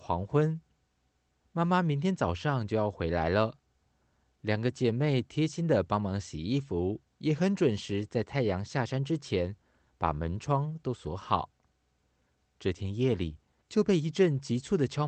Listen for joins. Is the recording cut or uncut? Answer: cut